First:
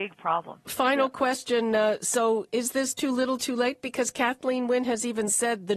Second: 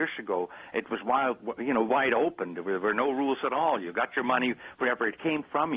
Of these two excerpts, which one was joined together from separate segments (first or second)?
second